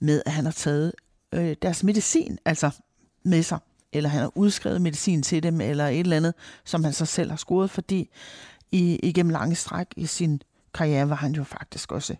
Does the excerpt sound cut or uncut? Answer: uncut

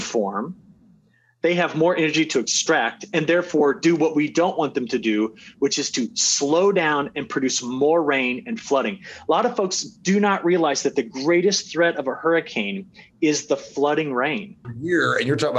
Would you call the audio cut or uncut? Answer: cut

